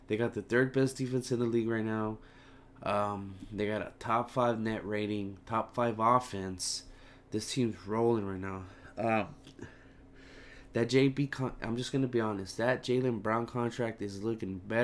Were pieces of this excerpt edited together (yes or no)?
no